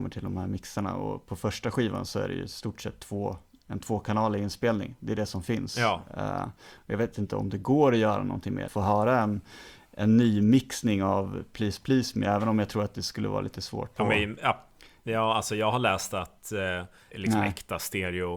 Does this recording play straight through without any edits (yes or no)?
no